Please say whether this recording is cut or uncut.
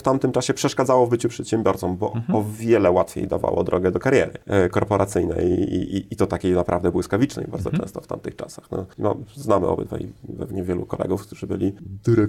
uncut